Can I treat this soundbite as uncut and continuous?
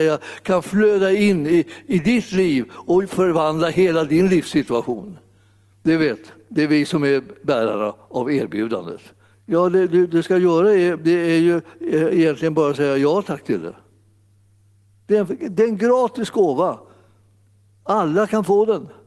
no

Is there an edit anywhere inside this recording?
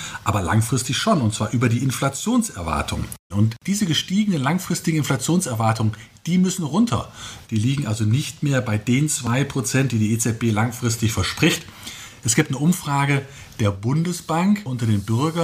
yes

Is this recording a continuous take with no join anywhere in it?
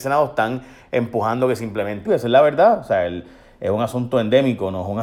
no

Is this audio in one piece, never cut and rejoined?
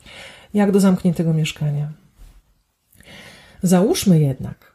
yes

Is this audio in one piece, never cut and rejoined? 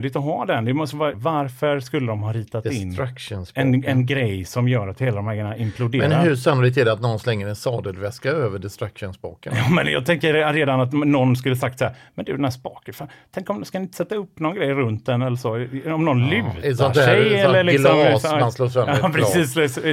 no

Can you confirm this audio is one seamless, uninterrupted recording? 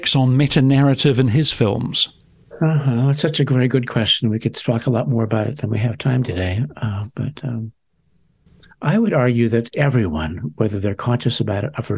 yes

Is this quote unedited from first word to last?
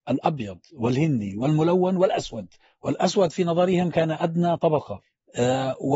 yes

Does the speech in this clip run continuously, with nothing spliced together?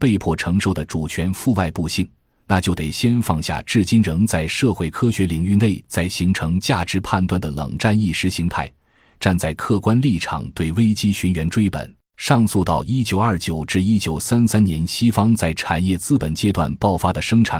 yes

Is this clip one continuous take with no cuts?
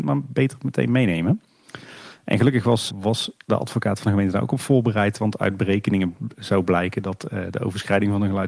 no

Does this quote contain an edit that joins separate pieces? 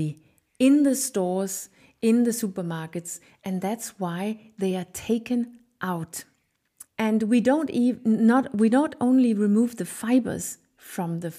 yes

